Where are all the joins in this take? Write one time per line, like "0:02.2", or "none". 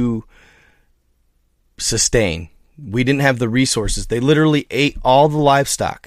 none